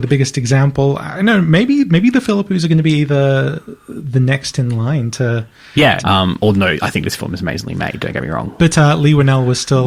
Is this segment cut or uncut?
cut